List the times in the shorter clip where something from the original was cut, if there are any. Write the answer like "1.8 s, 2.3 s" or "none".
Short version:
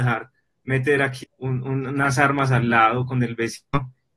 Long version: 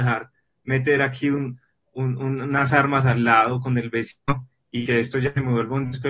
1.2 s